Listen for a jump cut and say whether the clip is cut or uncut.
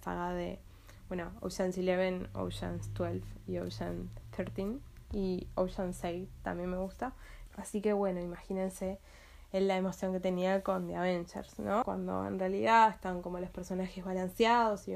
cut